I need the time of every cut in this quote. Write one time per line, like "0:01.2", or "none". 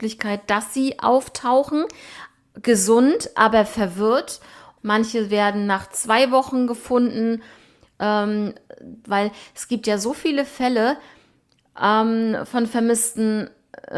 0:04.8
0:09.0